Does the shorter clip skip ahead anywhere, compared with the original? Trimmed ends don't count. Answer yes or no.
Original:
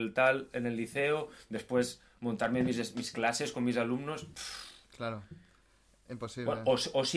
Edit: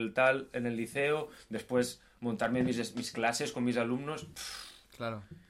no